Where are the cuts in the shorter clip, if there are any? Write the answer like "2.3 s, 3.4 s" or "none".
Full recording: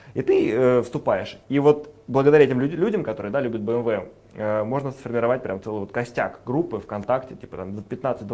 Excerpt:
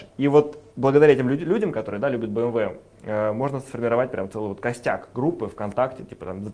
none